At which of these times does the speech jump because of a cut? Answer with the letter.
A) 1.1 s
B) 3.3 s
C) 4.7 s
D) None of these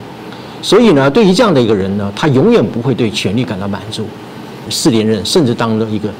C